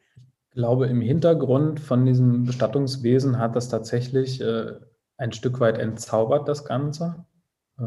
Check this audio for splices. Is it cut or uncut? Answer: uncut